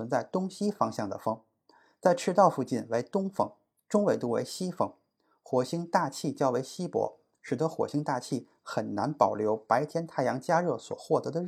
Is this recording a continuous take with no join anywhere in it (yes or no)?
yes